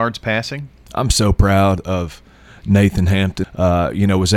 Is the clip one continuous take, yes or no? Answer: no